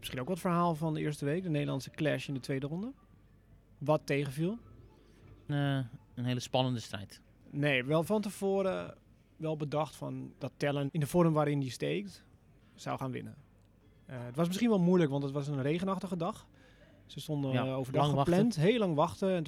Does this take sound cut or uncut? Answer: cut